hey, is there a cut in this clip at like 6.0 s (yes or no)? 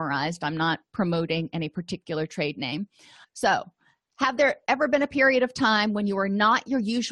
no